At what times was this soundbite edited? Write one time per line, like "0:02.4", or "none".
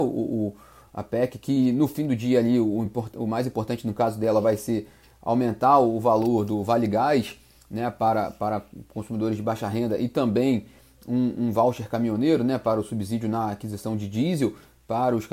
none